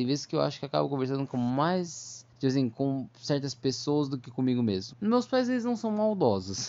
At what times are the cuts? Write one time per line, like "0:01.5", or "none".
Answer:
0:02.3
0:04.9